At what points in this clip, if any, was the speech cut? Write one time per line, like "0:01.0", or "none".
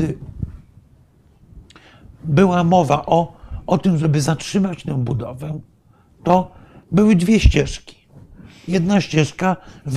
none